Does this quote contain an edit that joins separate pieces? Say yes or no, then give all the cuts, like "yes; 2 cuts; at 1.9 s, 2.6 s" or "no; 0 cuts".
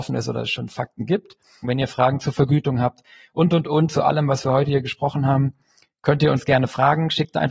yes; 1 cut; at 1.6 s